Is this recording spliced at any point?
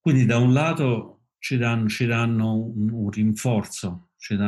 no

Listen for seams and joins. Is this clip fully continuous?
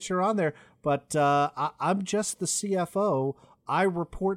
yes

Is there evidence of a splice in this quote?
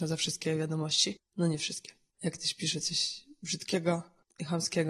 no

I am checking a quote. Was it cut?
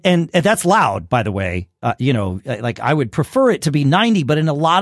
no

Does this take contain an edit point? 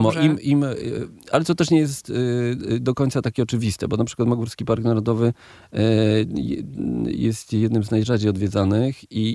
no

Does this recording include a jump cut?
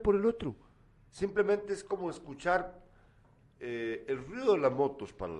no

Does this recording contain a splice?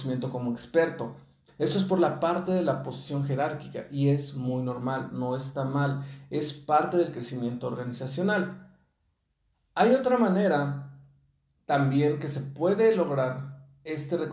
yes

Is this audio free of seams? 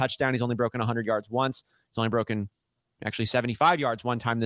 yes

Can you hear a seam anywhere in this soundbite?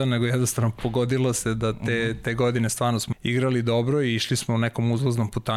yes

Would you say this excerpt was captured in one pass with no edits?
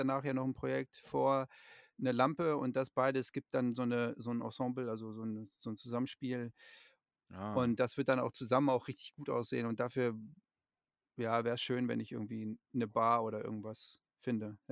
yes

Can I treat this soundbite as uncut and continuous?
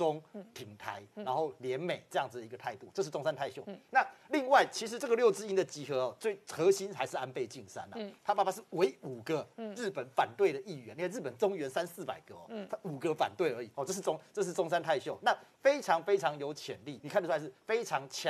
no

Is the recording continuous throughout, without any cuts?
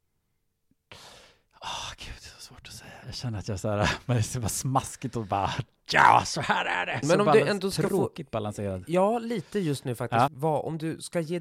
no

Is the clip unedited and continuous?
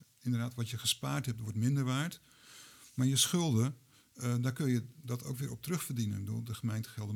yes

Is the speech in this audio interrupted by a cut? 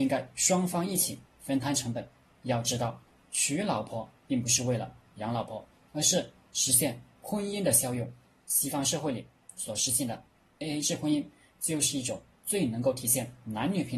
no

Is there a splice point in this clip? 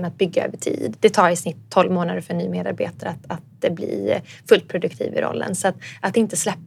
no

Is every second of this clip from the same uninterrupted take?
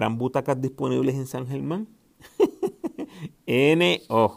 yes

